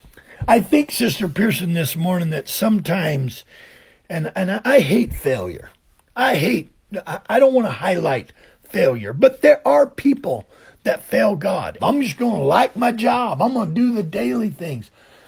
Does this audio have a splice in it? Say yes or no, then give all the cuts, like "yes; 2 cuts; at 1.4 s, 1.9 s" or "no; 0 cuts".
yes; 1 cut; at 11.8 s